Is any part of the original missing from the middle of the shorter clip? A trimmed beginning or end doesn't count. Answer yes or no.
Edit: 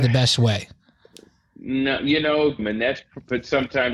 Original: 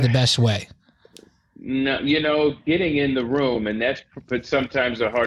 yes